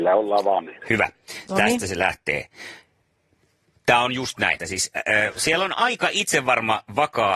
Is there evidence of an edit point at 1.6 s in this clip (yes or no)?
no